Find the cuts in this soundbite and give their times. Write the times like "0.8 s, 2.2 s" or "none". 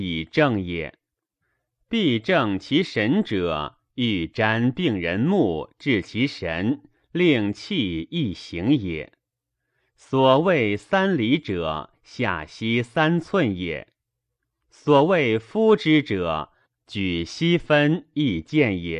none